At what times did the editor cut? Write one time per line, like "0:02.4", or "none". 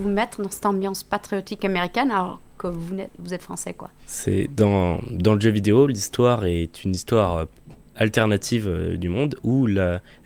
0:04.0